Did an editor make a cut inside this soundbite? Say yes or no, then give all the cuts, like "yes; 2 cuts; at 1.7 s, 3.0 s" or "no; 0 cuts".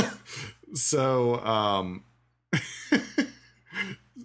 no; 0 cuts